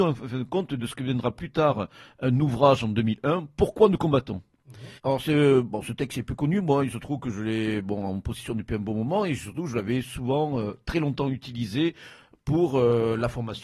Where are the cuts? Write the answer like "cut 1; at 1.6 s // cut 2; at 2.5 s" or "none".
cut 1; at 5.0 s